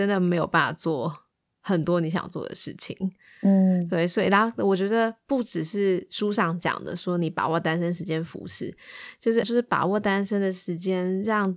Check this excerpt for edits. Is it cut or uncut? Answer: cut